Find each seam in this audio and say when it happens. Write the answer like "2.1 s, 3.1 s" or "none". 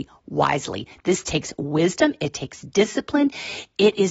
none